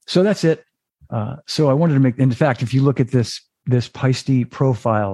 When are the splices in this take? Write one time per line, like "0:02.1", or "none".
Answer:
0:01.0